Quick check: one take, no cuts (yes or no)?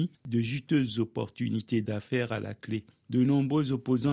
yes